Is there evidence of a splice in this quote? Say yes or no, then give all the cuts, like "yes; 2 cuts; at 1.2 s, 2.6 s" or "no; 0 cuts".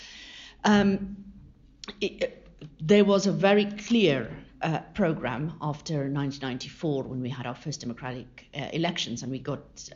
no; 0 cuts